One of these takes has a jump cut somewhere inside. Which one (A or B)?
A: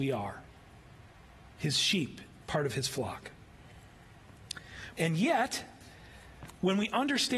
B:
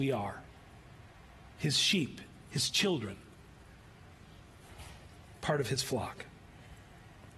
A